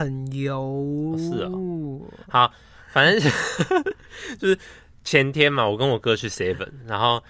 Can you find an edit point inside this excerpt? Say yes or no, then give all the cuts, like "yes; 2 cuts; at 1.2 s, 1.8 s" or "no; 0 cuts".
no; 0 cuts